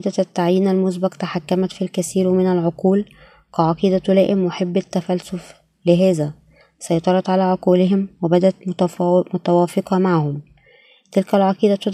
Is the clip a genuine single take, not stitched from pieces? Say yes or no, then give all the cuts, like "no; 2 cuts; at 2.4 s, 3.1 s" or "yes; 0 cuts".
yes; 0 cuts